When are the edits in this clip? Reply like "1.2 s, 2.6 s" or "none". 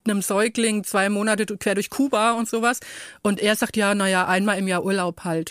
none